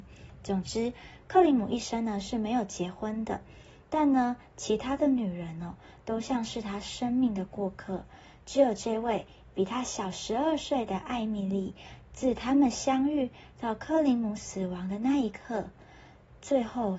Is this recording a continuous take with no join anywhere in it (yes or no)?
yes